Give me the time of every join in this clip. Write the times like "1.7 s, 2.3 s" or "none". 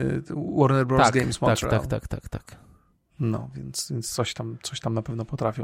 none